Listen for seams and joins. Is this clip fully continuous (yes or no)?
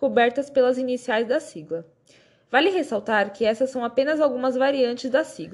yes